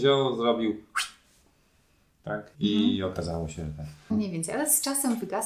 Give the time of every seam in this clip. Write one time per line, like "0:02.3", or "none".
0:02.5
0:04.1